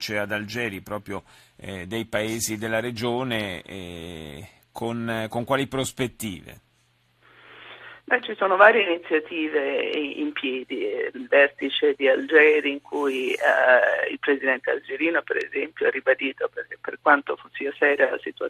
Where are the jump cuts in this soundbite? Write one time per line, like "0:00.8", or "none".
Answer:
none